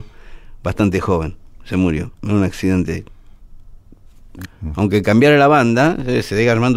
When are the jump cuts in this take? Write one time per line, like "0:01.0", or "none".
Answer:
0:04.4